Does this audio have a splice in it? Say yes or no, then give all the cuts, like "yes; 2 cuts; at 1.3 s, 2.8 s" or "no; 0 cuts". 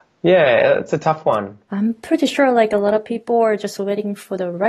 yes; 1 cut; at 1.7 s